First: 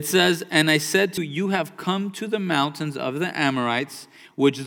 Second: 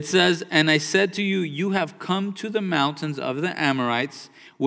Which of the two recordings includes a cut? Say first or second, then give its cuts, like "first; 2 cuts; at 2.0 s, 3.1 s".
first; 1 cut; at 1.2 s